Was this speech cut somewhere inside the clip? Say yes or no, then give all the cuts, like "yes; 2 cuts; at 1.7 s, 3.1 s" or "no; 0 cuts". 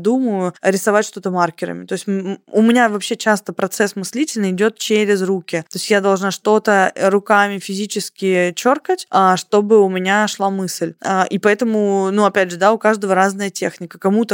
no; 0 cuts